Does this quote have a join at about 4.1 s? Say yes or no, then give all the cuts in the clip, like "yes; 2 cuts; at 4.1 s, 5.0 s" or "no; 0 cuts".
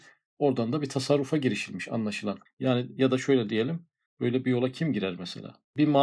yes; 2 cuts; at 2.5 s, 4.1 s